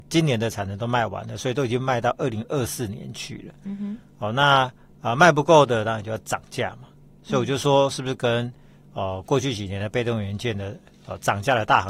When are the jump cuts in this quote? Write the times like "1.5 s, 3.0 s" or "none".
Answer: none